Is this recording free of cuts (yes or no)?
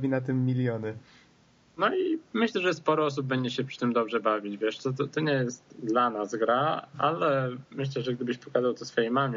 yes